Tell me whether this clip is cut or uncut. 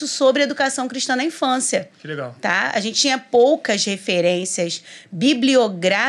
uncut